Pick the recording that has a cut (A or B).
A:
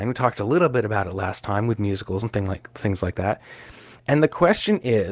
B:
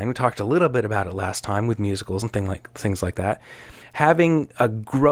B